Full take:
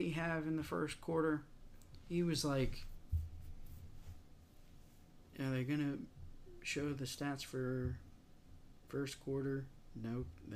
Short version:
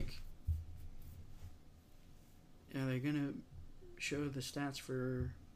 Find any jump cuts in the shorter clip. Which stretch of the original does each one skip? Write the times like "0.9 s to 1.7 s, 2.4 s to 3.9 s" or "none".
none